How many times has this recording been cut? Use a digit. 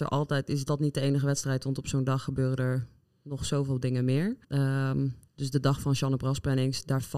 1